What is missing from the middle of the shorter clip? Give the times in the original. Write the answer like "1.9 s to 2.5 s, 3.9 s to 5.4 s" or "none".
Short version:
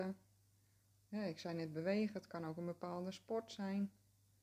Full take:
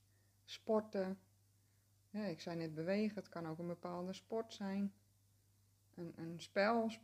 none